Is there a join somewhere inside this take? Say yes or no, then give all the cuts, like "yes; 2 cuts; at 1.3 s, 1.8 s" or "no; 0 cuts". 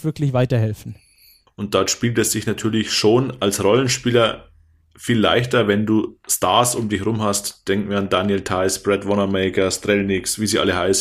yes; 1 cut; at 1.5 s